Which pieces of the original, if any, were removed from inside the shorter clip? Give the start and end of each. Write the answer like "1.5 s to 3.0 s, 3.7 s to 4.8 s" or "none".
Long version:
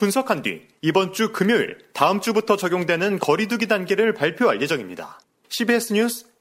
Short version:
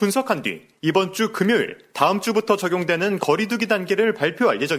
none

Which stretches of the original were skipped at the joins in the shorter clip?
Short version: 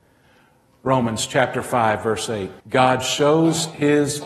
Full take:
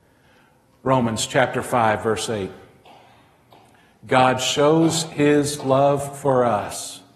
2.6 s to 4.0 s

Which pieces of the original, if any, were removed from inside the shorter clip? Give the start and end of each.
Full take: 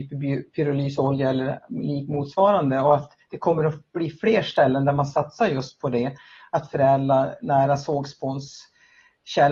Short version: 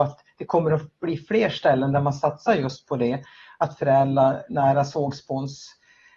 none

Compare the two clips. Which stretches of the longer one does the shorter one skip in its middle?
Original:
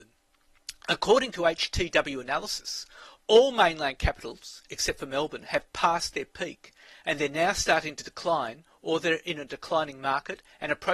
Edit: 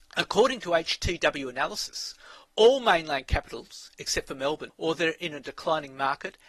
5.4 s to 8.7 s

